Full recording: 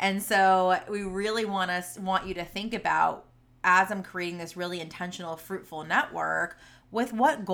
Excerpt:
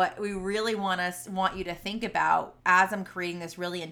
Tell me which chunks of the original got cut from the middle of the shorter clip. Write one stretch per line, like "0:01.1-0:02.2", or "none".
0:03.3-0:03.6